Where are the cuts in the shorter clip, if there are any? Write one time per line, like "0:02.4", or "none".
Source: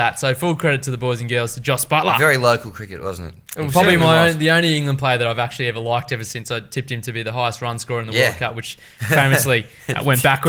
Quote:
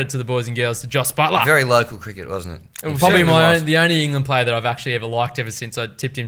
none